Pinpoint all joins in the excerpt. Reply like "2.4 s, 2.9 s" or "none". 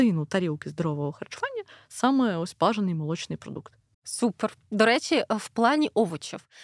3.9 s